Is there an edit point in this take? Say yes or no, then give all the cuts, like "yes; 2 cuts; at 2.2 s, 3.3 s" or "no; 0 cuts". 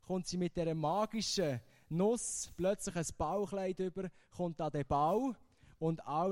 no; 0 cuts